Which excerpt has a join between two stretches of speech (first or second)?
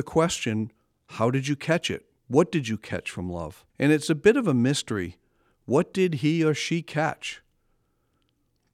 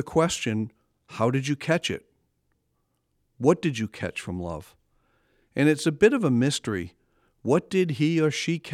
first